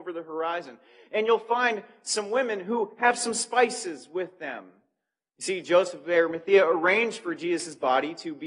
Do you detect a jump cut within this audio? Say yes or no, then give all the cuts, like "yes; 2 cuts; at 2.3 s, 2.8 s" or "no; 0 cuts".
no; 0 cuts